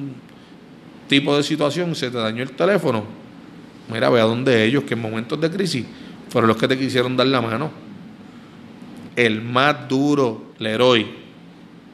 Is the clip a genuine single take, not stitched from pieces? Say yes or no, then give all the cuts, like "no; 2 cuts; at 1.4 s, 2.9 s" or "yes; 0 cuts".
no; 2 cuts; at 9.1 s, 10.5 s